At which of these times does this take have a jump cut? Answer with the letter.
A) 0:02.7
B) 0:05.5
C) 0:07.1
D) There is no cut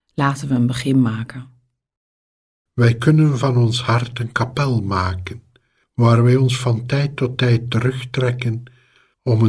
A